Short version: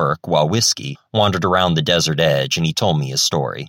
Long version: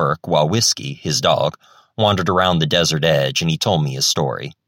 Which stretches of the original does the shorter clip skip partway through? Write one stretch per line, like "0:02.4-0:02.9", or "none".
0:01.0-0:01.8